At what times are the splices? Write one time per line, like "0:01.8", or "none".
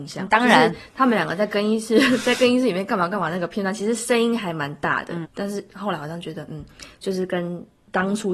0:05.2